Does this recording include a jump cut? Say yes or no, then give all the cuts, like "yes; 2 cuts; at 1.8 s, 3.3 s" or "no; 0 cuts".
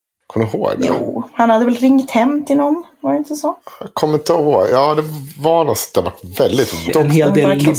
yes; 1 cut; at 6.9 s